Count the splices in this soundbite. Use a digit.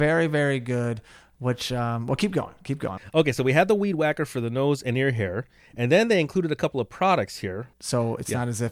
2